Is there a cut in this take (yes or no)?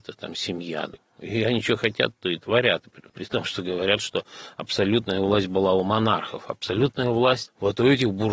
no